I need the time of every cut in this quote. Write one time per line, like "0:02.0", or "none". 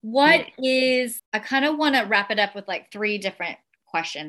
0:01.2